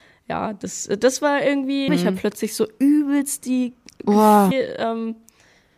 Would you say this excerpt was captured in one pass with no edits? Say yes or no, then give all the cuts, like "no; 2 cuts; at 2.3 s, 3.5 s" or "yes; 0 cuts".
no; 2 cuts; at 1.9 s, 4.5 s